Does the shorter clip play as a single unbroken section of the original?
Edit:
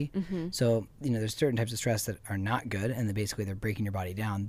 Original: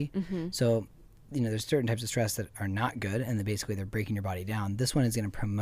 no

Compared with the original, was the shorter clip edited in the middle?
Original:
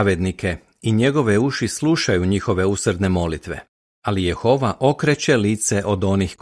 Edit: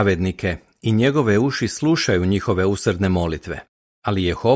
no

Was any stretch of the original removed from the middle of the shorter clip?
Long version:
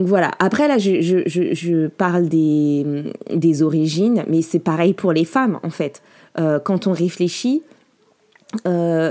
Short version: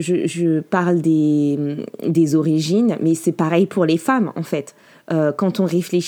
no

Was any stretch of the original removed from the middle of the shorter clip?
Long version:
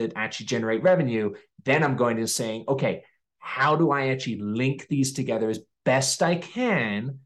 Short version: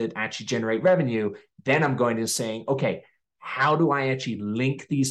no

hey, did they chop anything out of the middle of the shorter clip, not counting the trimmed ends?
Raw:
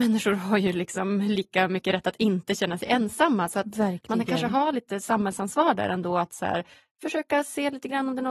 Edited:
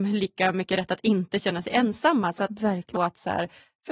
yes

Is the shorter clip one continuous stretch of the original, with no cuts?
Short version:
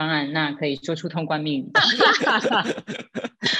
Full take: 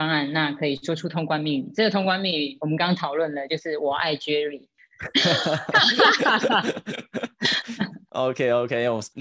no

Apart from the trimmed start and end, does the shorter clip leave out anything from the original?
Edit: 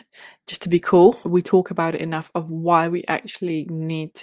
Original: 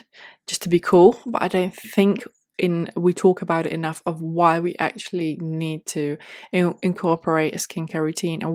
yes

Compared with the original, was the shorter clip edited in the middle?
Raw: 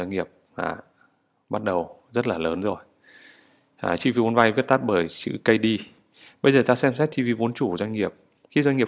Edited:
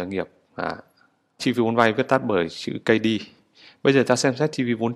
yes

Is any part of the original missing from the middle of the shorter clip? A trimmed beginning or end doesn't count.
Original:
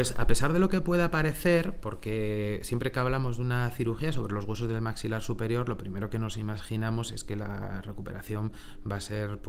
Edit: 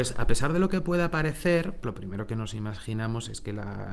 yes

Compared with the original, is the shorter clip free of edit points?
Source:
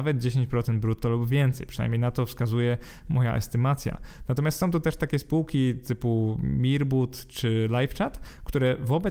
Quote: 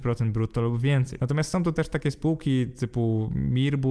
no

